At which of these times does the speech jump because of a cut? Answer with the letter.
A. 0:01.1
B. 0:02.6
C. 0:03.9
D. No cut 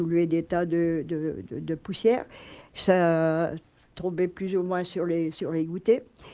C